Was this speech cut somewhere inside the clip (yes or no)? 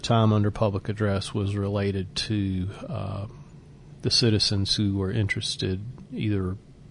no